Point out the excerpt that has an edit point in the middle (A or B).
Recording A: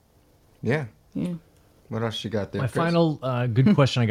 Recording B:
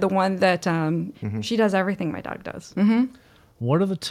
B